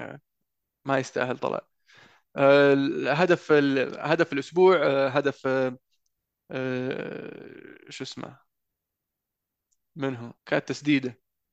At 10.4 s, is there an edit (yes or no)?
yes